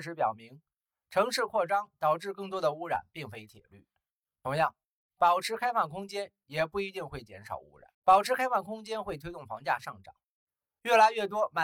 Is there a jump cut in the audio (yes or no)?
yes